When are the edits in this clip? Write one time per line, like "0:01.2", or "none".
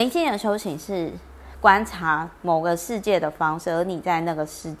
none

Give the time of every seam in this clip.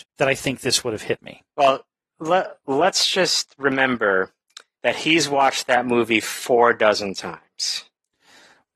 none

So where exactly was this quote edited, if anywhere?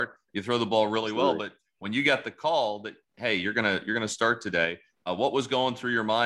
none

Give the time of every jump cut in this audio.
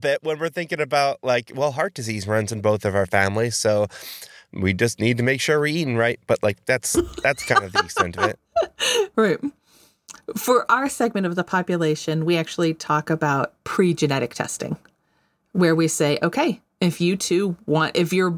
0:09.1

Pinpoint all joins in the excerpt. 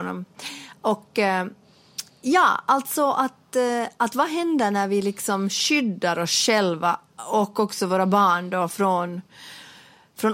none

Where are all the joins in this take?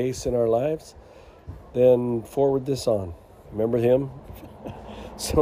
0:03.4

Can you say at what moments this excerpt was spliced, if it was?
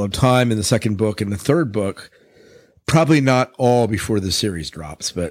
none

